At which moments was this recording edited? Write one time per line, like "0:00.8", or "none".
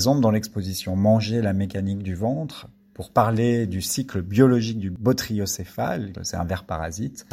0:06.2